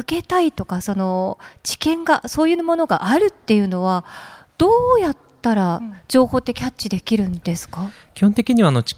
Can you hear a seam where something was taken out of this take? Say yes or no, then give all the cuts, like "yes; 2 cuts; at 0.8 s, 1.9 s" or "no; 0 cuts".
no; 0 cuts